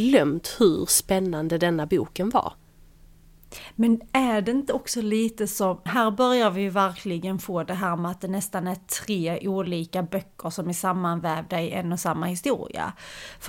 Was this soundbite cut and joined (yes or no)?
yes